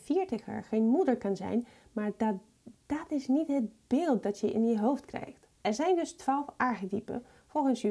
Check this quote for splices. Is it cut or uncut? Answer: uncut